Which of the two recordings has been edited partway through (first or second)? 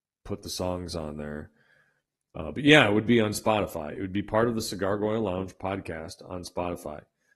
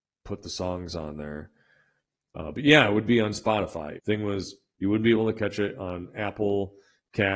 second